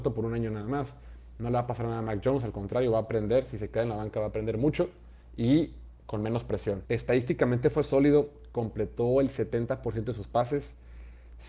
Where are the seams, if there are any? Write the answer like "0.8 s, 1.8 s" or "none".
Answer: 6.8 s